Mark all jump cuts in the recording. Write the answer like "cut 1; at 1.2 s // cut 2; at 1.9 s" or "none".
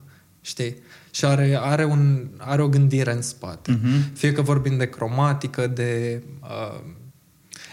none